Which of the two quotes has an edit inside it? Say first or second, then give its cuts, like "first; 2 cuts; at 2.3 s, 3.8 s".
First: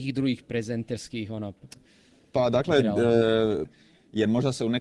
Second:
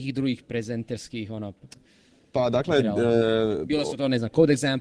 first; 1 cut; at 3.6 s